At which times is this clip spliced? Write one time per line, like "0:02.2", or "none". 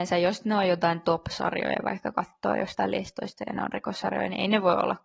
none